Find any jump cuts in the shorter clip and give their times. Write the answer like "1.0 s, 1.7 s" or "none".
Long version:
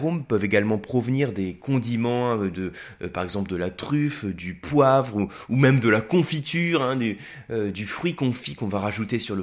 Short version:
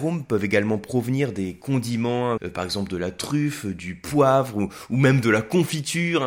2.4 s